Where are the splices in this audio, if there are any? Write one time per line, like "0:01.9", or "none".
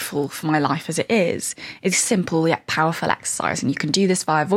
0:01.9